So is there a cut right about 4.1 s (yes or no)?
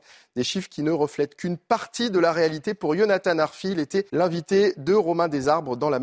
yes